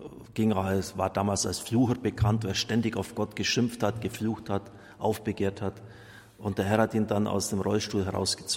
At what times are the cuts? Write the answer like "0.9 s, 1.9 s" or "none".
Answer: none